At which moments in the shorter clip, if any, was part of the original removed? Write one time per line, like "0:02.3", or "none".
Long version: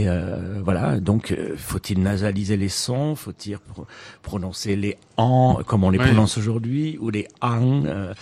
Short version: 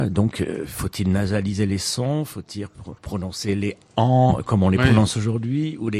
0:03.0